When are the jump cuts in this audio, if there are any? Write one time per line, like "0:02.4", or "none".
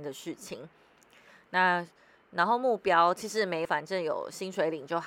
0:03.6